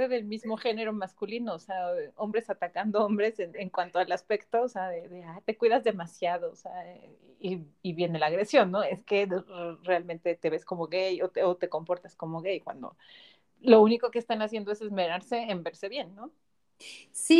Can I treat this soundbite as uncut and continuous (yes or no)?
yes